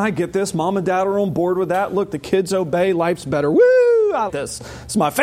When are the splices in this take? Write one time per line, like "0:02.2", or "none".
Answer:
0:04.3